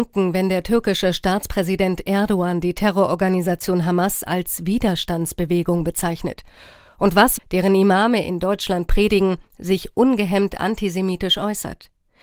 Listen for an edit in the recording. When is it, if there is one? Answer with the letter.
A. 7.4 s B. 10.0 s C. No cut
A